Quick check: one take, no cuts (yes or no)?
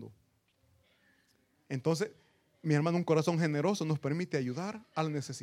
yes